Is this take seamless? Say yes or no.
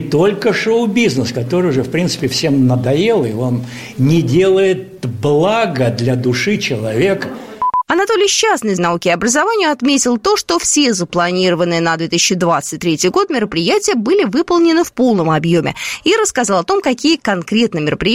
no